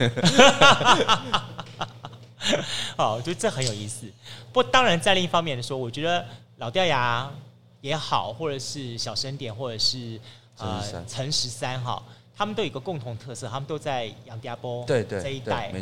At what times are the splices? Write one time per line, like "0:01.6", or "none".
none